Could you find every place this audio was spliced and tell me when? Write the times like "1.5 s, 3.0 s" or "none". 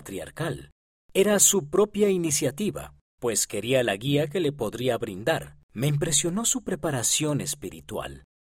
1.0 s, 5.7 s